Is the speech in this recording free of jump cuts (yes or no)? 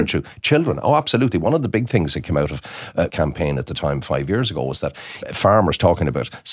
no